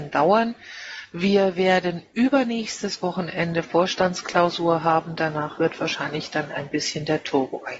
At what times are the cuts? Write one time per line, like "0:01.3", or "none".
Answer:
none